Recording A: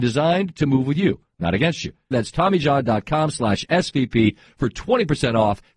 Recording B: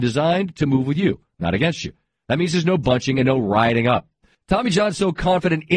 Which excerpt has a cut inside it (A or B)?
A